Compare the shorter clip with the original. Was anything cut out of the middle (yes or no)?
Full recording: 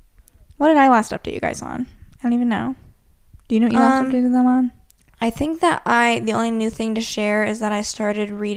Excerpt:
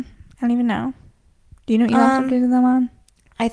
no